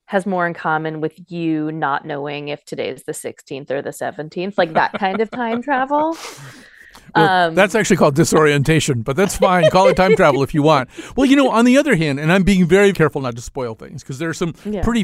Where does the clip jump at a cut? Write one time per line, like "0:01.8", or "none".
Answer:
0:12.9